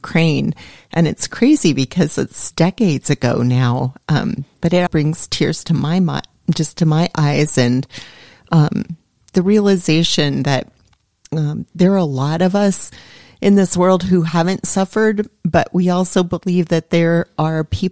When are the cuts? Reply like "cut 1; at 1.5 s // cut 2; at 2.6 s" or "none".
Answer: cut 1; at 4.9 s